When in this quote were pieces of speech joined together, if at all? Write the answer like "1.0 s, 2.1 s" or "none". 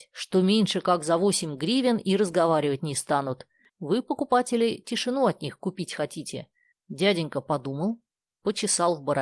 3.7 s, 6.7 s